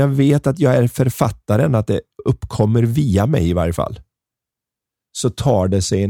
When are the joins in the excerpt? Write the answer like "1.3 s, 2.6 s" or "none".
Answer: none